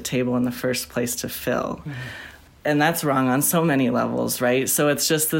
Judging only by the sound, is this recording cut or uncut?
uncut